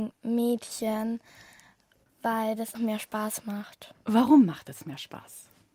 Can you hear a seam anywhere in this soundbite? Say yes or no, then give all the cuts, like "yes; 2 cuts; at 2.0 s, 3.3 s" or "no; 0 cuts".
yes; 1 cut; at 2.7 s